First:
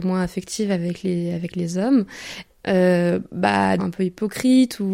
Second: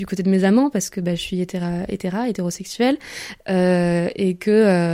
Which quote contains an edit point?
first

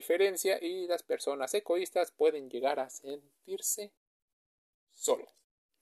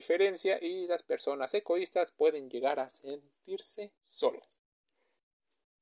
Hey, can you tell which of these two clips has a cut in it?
second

